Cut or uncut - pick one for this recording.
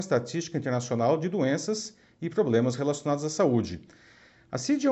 uncut